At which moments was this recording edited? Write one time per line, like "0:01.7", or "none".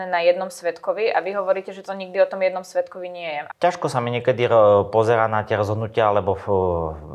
0:03.5